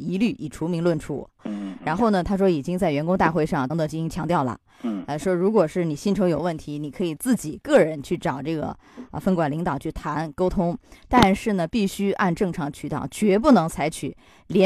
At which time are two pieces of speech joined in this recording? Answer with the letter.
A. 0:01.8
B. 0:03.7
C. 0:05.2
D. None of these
B